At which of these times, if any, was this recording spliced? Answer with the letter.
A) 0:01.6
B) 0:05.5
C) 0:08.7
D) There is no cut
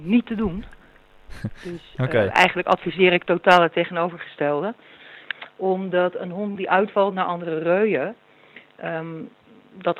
D